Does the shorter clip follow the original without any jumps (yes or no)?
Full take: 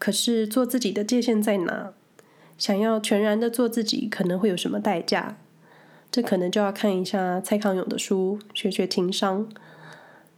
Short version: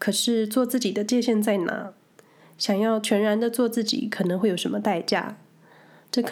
yes